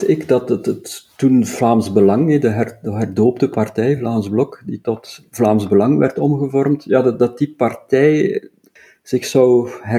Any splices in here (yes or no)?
no